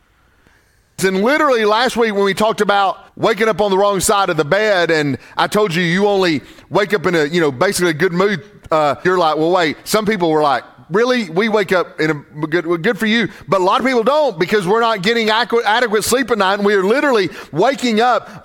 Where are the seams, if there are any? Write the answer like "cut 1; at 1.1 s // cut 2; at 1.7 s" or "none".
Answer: cut 1; at 1.0 s // cut 2; at 3.1 s // cut 3; at 9.0 s